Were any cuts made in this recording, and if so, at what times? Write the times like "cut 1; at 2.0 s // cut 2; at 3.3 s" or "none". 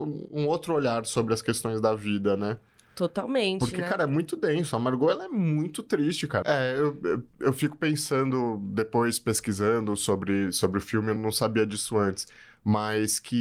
cut 1; at 6.4 s // cut 2; at 11.2 s